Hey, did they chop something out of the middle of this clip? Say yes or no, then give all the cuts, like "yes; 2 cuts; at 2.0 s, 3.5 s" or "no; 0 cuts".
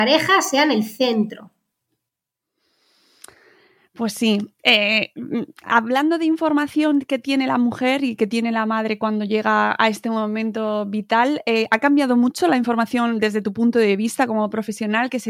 no; 0 cuts